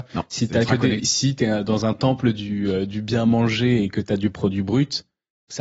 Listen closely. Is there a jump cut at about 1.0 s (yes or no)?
yes